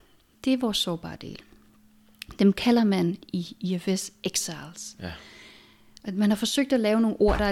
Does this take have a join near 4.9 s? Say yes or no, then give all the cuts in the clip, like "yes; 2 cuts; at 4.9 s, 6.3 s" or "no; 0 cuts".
no; 0 cuts